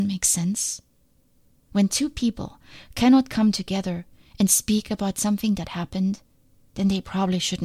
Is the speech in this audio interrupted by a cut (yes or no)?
no